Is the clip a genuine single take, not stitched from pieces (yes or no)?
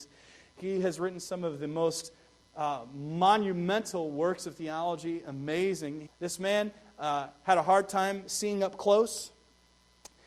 no